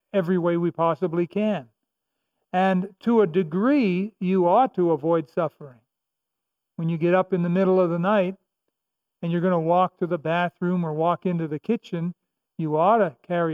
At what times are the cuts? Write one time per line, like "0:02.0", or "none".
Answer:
none